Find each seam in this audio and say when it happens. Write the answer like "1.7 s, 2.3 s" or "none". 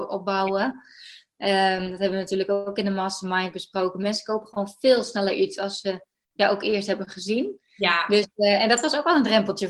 none

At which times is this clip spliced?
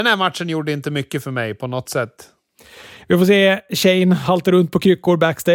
none

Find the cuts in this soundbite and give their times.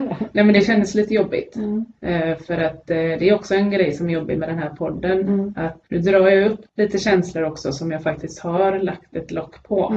5.8 s

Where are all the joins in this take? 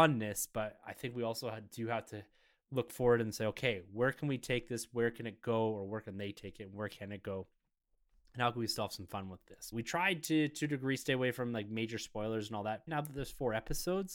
9.7 s, 12.9 s

